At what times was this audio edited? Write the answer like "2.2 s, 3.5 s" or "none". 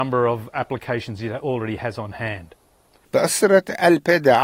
3.1 s